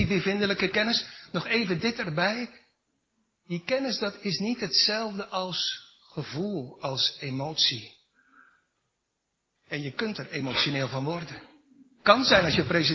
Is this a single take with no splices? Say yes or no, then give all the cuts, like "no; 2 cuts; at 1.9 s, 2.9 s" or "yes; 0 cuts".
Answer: yes; 0 cuts